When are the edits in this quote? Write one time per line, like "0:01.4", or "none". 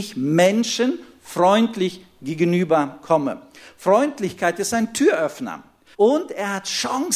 0:05.9